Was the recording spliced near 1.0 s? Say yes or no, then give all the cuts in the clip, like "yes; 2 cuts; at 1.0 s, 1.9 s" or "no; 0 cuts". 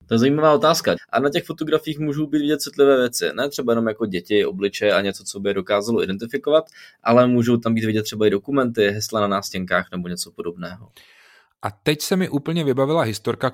yes; 1 cut; at 1.0 s